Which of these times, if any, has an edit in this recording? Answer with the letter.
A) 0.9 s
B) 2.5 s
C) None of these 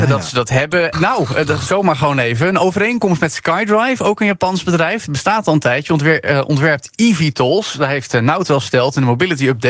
A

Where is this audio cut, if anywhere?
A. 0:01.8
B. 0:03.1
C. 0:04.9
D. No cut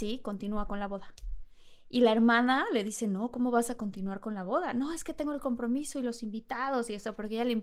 D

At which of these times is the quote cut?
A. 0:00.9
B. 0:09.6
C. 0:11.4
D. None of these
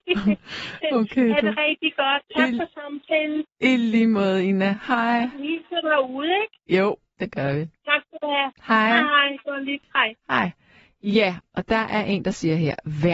D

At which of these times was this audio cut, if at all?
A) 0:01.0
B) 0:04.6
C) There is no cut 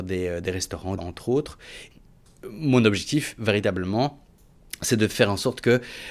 A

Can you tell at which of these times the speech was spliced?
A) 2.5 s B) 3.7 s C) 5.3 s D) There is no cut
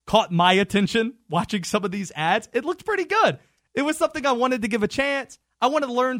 D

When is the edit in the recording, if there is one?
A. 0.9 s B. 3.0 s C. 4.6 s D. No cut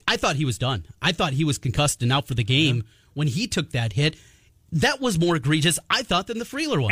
D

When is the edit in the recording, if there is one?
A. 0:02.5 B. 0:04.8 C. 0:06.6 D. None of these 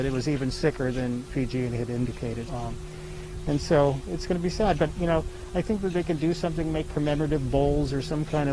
A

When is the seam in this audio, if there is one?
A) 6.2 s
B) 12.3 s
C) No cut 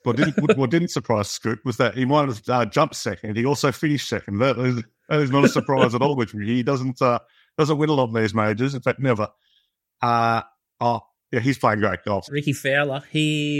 B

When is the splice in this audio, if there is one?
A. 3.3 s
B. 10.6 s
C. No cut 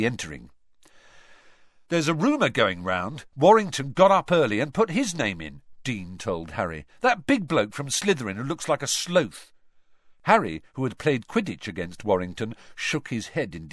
C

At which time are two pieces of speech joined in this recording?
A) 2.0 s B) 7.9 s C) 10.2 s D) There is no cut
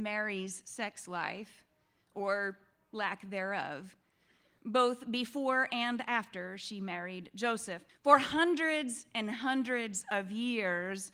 B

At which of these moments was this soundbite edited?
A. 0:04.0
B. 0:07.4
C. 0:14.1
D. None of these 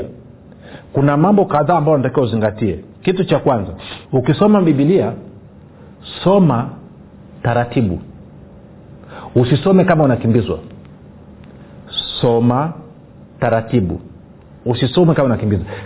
A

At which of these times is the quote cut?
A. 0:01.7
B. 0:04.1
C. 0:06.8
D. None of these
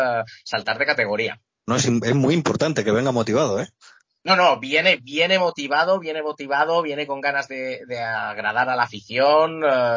A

